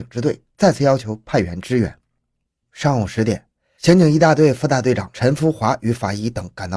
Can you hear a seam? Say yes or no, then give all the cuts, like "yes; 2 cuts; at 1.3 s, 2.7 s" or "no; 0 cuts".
no; 0 cuts